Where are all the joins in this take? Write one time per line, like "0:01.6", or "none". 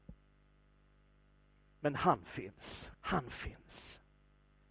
0:02.9